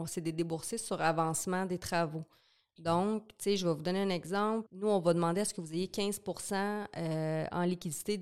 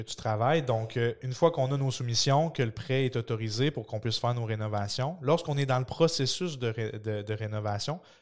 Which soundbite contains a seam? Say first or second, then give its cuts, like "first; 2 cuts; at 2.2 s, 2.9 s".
first; 1 cut; at 4.7 s